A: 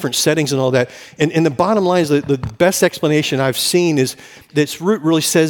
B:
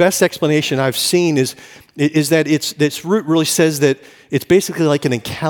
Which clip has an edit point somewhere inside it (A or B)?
A